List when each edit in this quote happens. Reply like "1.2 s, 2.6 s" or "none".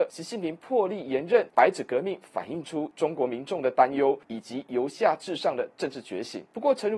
1.5 s